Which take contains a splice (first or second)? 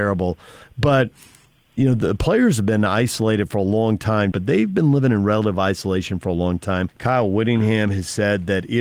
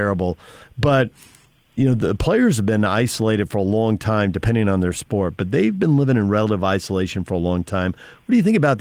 first